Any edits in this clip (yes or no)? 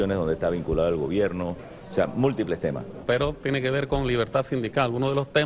no